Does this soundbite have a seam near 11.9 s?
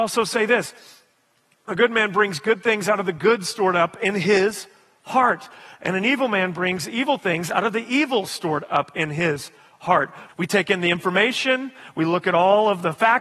no; 1 cut; at 10.3 s

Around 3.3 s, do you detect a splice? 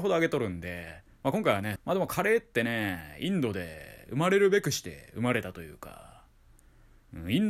no; 1 cut; at 1.8 s

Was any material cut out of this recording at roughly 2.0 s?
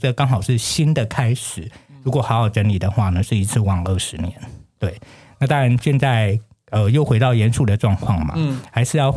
no; 0 cuts

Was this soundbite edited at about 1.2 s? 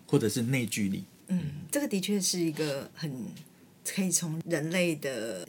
no; 0 cuts

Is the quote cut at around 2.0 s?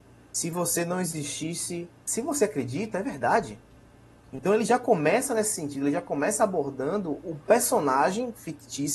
yes; 1 cut; at 2.0 s

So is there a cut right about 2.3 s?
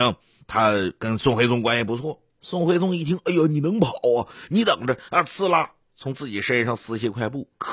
yes; 1 cut; at 2.3 s

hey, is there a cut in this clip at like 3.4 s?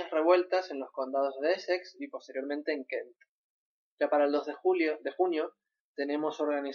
no; 0 cuts

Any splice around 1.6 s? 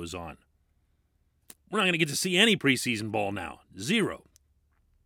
yes; 1 cut; at 1.6 s

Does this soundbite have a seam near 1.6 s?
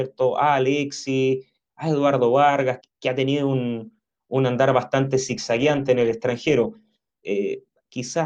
no; 2 cuts; at 2.8 s, 7.2 s

